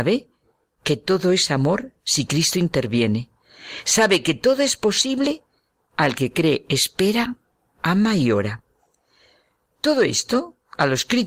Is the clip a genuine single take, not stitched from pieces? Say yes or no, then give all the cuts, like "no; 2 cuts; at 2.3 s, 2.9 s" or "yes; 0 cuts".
yes; 0 cuts